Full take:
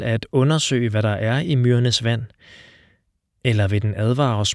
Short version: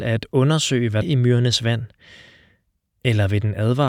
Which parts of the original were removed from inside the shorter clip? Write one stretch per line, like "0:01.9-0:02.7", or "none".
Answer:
0:01.0-0:01.4